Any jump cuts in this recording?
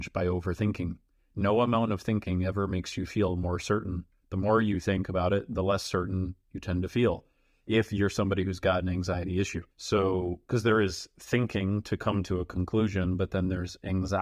yes; 1 cut; at 9.7 s

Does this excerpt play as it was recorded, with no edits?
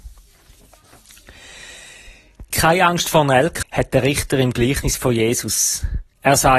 no; 1 cut; at 3.6 s

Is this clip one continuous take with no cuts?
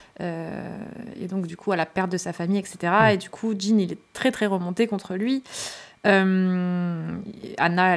yes; 0 cuts

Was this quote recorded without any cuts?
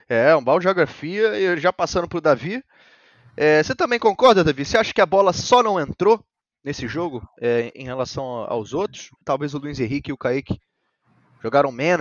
no; 2 cuts; at 7.7 s, 9.2 s

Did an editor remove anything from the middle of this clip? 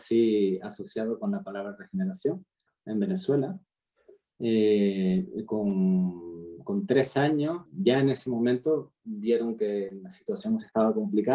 yes; 2 cuts; at 2.7 s, 7.7 s

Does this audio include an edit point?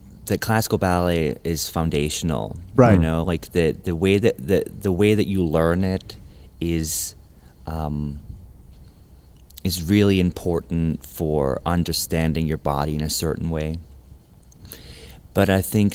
no; 0 cuts

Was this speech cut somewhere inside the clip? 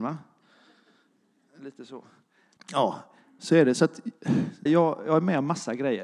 yes; 2 cuts; at 2.6 s, 4.7 s

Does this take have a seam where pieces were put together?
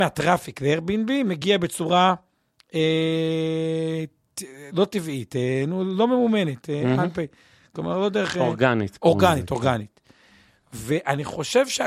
yes; 1 cut; at 4.7 s

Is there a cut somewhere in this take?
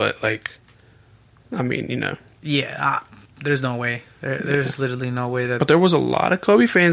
no; 0 cuts

